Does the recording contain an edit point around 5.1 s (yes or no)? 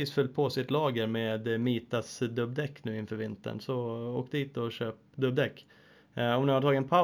yes